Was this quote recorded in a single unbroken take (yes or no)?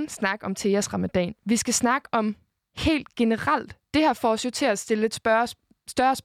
yes